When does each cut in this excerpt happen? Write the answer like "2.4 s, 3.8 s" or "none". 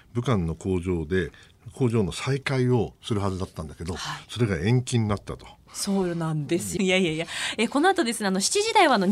5.7 s, 6.8 s